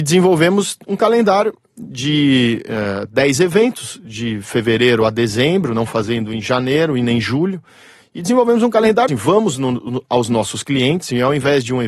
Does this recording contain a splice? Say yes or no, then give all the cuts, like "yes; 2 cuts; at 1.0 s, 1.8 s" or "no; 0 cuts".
yes; 1 cut; at 9.1 s